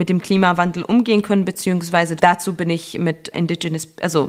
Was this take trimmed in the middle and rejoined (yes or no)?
yes